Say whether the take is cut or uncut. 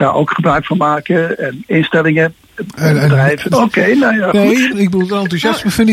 cut